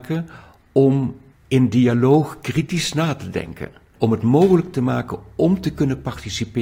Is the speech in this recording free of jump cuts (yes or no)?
no